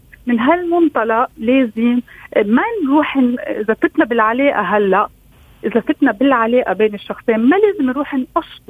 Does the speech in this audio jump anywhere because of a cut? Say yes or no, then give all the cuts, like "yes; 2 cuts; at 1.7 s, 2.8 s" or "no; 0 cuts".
no; 0 cuts